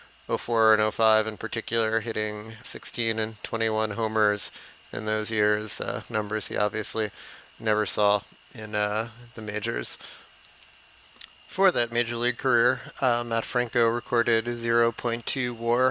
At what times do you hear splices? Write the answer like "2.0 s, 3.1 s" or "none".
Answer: 2.6 s